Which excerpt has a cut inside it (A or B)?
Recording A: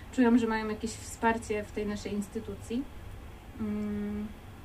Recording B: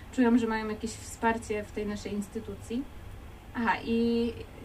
B